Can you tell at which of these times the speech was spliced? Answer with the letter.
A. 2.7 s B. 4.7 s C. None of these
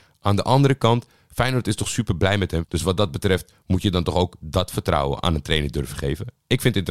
A